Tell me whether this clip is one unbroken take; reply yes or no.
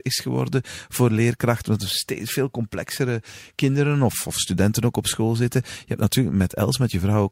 yes